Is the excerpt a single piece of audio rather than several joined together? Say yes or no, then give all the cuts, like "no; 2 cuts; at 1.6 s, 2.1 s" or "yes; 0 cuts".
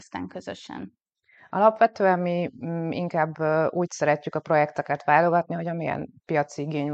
yes; 0 cuts